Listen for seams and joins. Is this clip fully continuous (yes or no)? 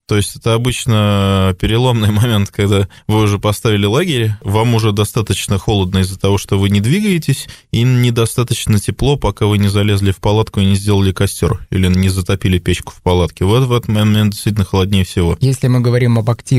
yes